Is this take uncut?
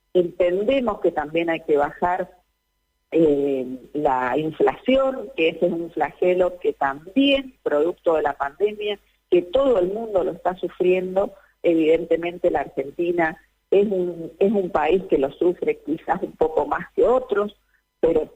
no; 1 cut; at 14.4 s

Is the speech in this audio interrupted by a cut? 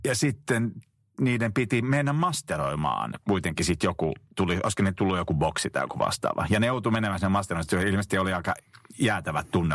no; 0 cuts

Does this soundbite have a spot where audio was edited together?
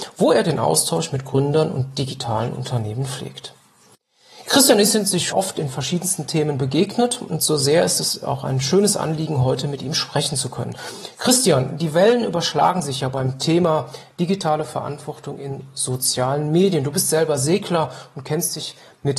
yes; 1 cut; at 5.3 s

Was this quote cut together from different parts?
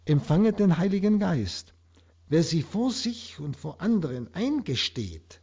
yes; 1 cut; at 2.1 s

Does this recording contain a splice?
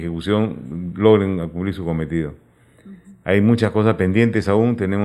no; 0 cuts

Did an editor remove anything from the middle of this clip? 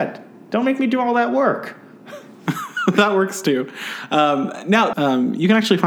yes; 1 cut; at 4.9 s

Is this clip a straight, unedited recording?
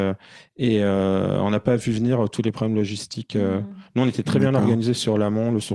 yes; 0 cuts

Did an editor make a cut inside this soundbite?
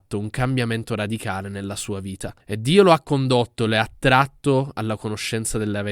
yes; 1 cut; at 2.4 s

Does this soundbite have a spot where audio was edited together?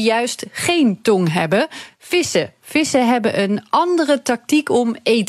no; 0 cuts

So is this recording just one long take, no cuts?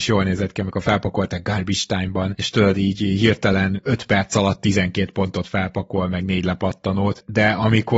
yes; 0 cuts

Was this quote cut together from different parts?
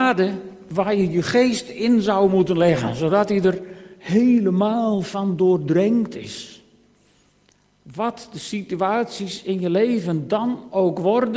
no; 0 cuts

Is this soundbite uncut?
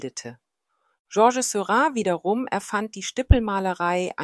no; 1 cut; at 0.9 s

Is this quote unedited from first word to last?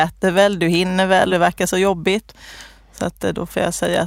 no; 1 cut; at 1.3 s

